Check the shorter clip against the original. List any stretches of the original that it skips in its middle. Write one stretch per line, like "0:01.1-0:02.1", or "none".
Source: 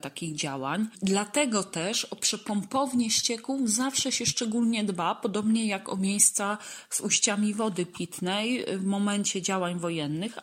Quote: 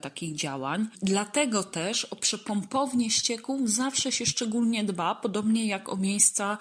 none